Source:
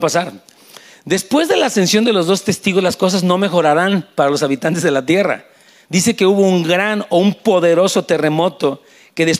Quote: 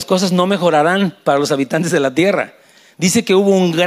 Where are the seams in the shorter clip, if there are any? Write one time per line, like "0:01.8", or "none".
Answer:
none